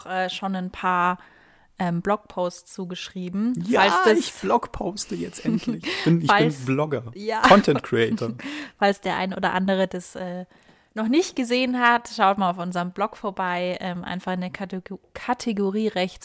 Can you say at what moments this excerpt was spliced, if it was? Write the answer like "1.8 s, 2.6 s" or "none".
none